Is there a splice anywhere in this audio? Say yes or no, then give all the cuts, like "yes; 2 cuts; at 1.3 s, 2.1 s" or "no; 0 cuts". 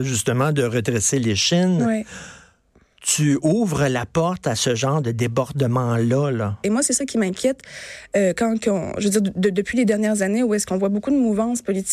yes; 1 cut; at 6.6 s